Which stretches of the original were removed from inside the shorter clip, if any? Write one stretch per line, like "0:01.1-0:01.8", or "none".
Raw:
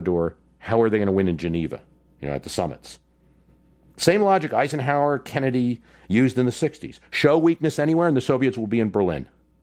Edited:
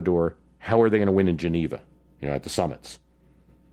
none